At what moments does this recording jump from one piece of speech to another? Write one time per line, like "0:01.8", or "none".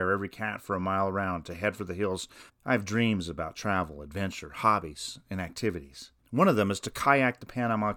0:02.5